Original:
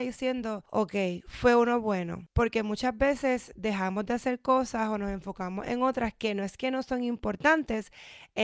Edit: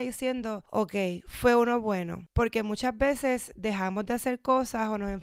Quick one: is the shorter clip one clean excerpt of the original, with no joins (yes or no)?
yes